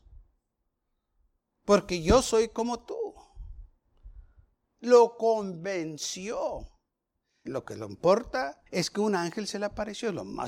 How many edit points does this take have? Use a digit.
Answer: 2